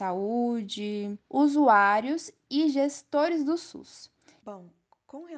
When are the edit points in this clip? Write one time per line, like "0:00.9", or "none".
0:01.2
0:04.4

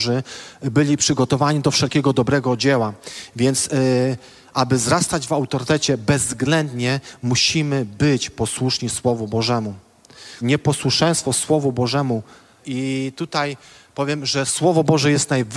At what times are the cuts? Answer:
0:10.4
0:12.6

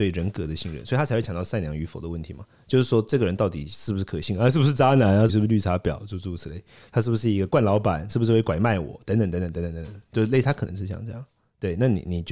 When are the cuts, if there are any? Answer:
0:05.3

